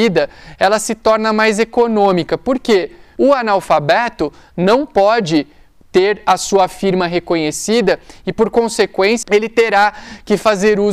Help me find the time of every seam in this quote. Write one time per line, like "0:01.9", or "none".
0:03.2
0:09.2